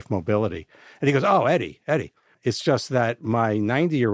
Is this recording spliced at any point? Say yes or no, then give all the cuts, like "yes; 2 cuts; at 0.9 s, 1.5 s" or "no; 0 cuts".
yes; 1 cut; at 2.3 s